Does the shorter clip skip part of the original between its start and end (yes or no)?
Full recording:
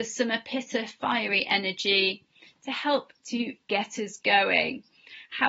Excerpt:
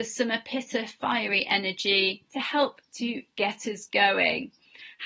yes